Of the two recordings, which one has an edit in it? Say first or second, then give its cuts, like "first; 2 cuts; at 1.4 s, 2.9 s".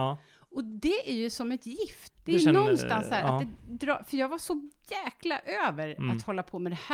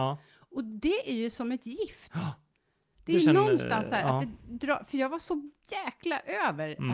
first; 1 cut; at 2.1 s